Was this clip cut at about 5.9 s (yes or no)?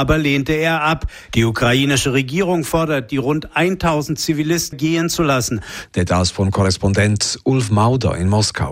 yes